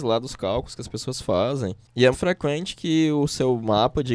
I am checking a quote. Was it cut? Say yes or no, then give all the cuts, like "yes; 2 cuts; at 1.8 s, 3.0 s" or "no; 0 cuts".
yes; 1 cut; at 2.1 s